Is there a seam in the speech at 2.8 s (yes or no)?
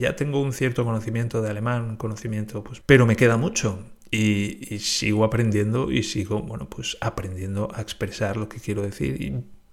yes